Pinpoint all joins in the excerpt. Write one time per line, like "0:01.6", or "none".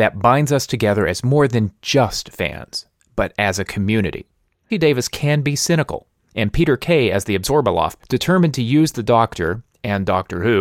0:04.7
0:08.0